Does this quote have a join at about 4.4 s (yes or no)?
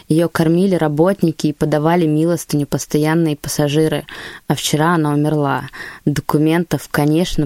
no